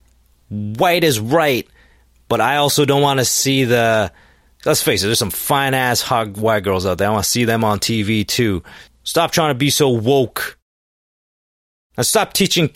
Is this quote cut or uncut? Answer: cut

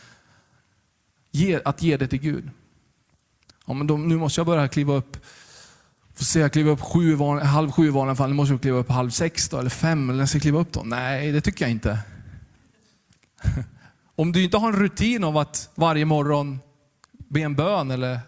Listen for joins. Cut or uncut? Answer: uncut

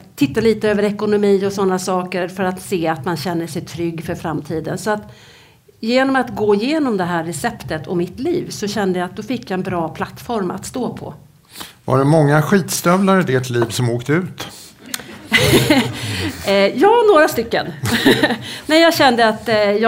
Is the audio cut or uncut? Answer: uncut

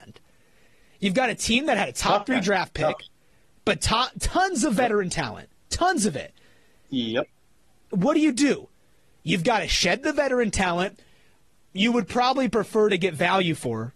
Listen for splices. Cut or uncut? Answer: uncut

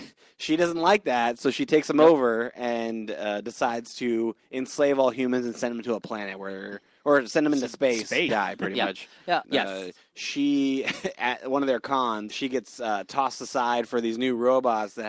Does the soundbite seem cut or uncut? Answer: cut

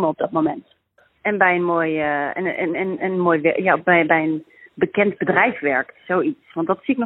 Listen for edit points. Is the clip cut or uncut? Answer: uncut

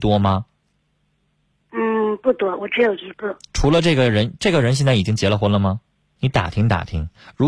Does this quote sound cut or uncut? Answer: cut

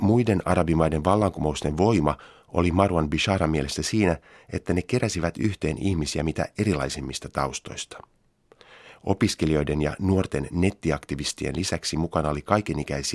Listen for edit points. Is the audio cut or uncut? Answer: uncut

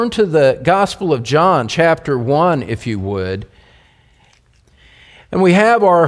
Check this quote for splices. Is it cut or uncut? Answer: uncut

